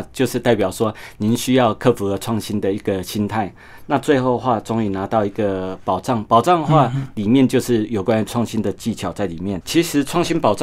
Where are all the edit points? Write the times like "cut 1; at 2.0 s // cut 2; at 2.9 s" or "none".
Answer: cut 1; at 9.6 s